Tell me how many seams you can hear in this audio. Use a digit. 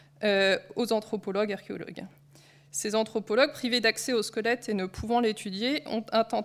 0